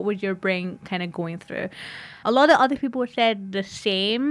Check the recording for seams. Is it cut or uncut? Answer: cut